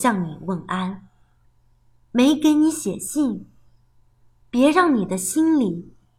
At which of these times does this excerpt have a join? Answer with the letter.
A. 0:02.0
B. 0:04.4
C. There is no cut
B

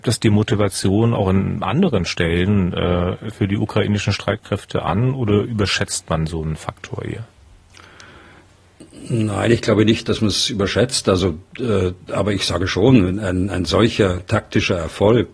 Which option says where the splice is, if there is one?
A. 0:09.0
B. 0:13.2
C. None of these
C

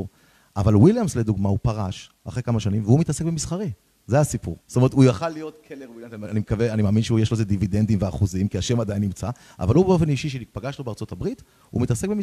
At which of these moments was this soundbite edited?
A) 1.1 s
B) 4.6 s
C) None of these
B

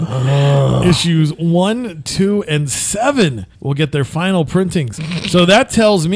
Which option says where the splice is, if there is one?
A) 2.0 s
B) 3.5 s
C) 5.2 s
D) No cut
B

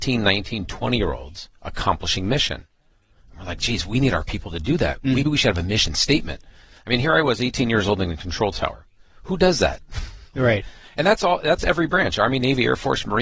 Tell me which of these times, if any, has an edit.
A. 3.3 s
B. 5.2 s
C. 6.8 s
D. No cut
B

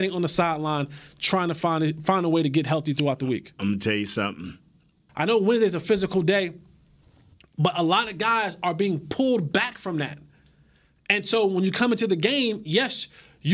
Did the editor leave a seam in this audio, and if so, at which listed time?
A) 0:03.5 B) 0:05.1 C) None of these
B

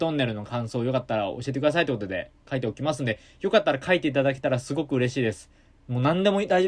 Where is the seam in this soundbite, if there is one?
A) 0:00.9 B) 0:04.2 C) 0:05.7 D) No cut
D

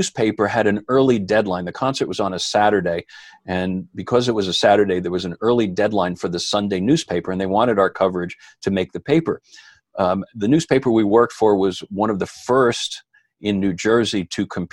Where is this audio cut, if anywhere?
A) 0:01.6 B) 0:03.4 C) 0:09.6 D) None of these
D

